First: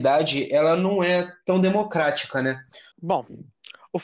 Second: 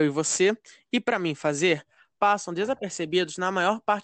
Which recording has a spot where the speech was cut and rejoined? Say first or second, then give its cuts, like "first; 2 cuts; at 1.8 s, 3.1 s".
first; 1 cut; at 2.9 s